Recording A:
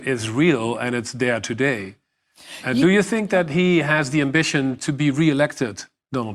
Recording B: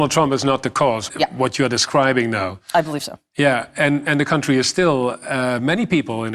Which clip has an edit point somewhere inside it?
B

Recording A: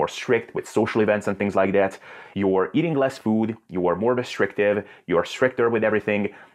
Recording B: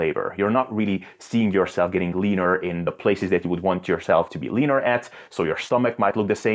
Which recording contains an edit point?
A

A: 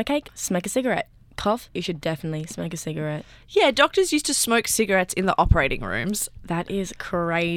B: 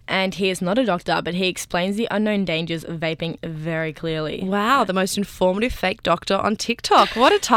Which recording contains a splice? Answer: A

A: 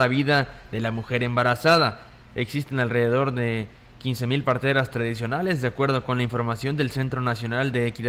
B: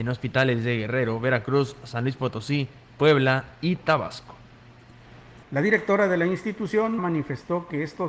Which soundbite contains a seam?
B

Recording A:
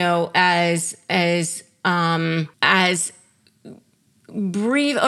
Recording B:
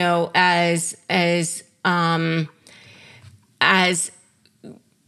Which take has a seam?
A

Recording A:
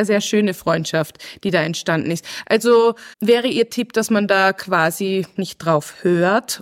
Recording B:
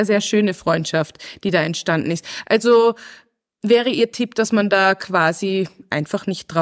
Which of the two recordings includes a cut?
A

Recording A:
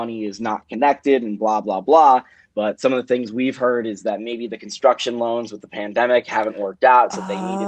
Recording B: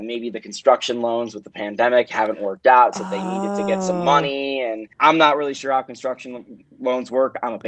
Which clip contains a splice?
B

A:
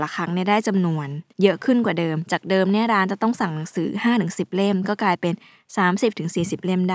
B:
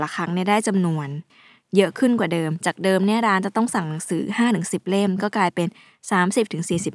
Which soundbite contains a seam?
A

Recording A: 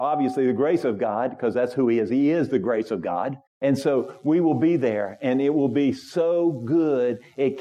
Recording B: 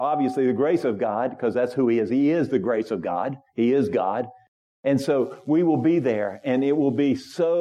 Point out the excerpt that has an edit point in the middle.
A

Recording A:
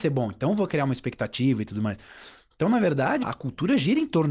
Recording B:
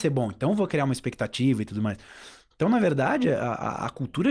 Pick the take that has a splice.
A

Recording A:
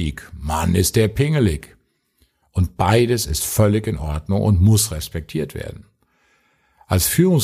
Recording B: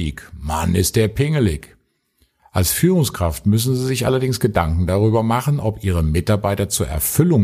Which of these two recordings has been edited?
B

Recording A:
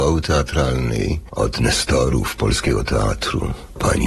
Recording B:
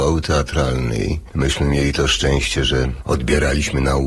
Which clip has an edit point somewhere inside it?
A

